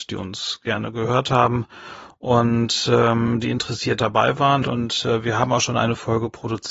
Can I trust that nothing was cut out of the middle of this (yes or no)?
no